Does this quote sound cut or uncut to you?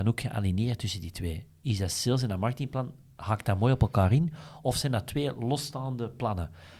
uncut